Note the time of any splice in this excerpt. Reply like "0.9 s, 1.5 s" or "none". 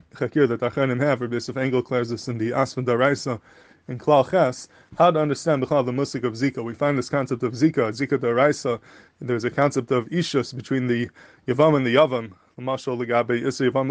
none